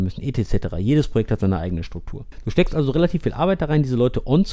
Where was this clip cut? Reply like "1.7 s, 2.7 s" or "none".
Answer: none